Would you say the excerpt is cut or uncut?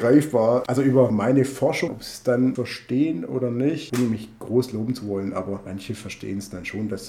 cut